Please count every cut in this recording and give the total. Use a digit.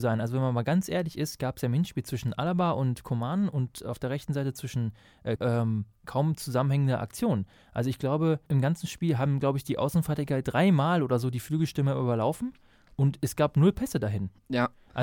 2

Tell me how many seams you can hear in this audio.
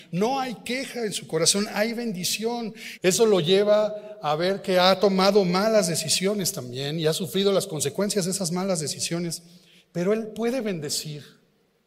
1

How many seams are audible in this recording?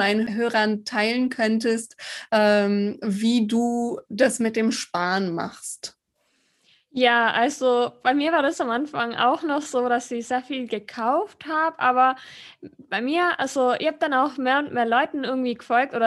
0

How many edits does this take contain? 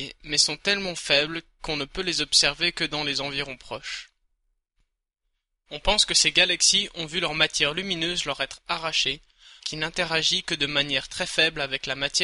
1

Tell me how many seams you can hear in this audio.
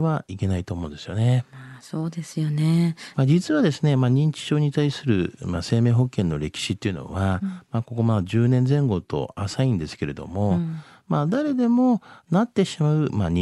1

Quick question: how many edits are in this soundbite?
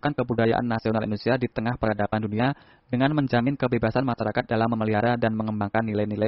0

